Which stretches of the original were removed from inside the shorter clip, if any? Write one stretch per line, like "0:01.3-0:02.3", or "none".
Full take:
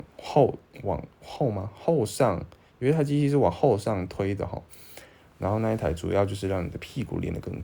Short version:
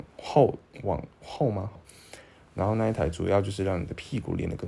0:01.8-0:04.6